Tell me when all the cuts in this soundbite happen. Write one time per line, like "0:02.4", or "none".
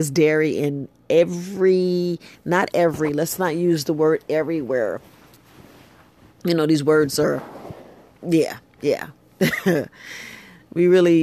none